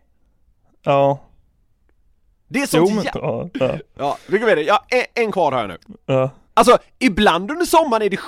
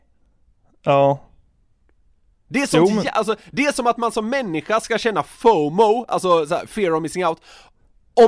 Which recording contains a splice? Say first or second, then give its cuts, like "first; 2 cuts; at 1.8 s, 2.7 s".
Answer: first; 2 cuts; at 3.1 s, 6.5 s